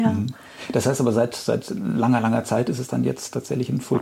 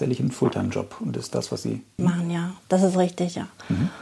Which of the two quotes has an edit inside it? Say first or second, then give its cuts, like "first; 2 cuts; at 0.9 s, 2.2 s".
second; 1 cut; at 2.0 s